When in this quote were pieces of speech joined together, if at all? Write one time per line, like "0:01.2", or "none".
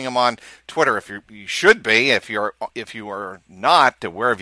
none